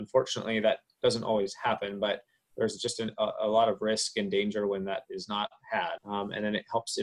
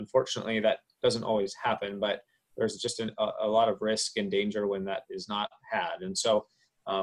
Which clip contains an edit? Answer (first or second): first